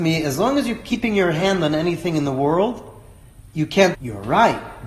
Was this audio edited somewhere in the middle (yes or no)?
yes